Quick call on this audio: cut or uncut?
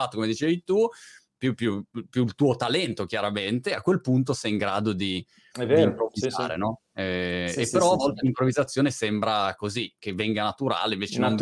uncut